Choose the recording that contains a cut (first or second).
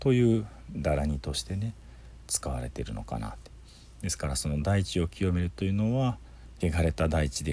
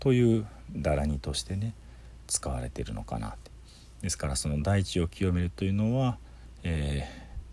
first